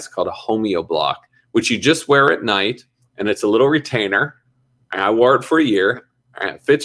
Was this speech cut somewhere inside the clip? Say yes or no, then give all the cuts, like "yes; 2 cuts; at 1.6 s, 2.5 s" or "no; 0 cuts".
no; 0 cuts